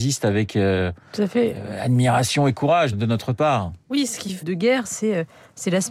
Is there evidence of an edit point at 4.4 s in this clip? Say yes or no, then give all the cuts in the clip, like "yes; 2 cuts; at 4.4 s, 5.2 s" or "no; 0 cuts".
yes; 2 cuts; at 2.9 s, 4.4 s